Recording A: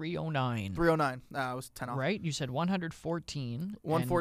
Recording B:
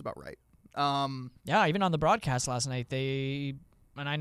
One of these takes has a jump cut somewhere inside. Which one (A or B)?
B